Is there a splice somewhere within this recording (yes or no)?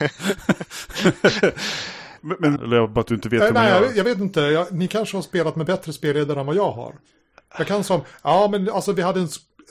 yes